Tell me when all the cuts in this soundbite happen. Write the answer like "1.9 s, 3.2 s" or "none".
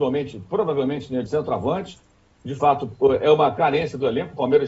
1.3 s